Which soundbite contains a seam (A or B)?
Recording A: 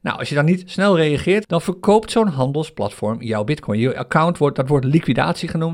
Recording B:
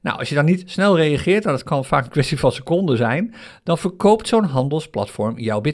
A